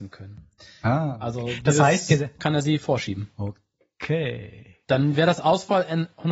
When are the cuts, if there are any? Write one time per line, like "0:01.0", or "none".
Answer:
0:02.4